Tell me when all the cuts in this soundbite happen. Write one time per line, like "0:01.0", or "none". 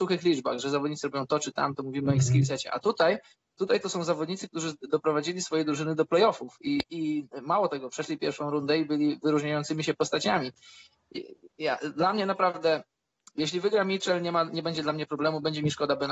none